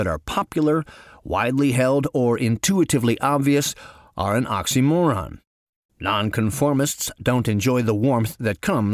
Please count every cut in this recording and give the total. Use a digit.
1